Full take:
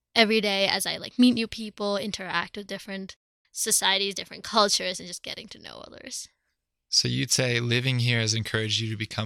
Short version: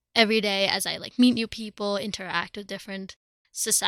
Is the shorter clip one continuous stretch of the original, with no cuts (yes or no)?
yes